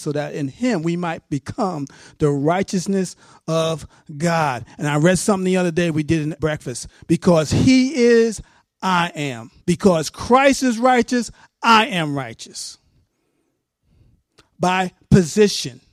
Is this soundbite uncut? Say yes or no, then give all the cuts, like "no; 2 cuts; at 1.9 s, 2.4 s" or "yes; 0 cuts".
no; 2 cuts; at 6.4 s, 9.6 s